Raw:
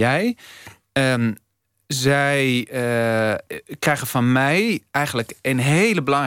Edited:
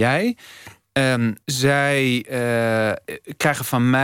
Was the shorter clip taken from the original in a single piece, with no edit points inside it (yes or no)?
no